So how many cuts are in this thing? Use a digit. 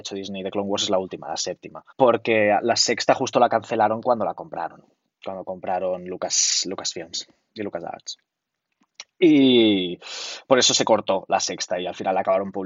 1